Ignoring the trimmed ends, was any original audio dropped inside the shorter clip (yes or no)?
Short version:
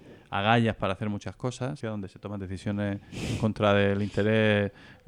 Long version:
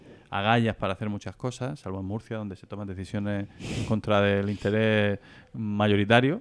yes